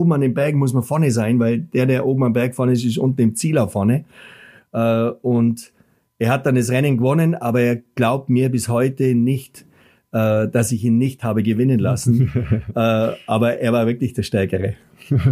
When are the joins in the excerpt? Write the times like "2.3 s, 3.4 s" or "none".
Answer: none